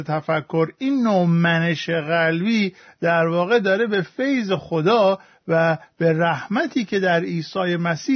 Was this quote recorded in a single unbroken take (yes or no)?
yes